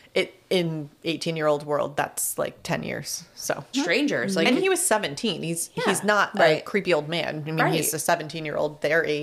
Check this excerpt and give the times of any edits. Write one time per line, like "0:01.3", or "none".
0:03.7